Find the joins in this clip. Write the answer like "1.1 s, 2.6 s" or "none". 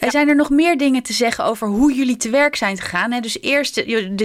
none